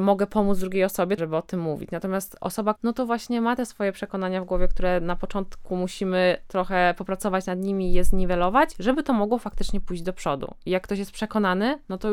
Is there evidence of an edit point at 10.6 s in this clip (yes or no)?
no